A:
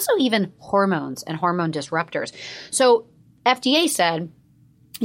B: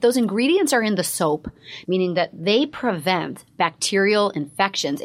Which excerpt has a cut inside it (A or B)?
B